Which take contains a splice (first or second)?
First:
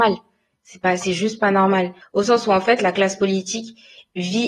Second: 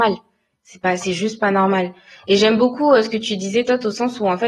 first